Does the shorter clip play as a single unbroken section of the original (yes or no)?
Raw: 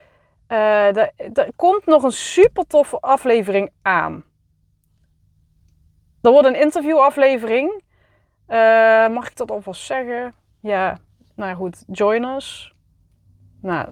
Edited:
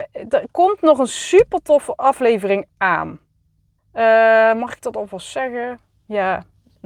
no